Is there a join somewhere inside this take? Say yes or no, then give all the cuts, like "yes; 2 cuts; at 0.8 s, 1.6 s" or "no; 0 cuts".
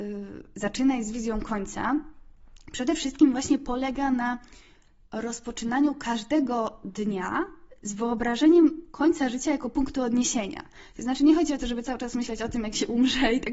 no; 0 cuts